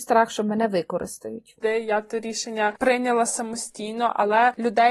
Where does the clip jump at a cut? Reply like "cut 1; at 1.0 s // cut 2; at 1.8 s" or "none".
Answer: cut 1; at 1.6 s